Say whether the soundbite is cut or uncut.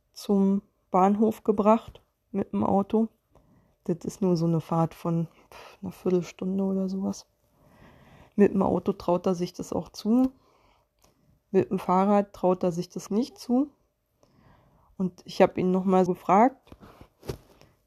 cut